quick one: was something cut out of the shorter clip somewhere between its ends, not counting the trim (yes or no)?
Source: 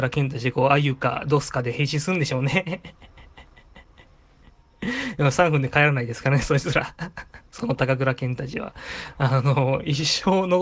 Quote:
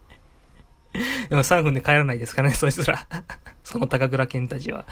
no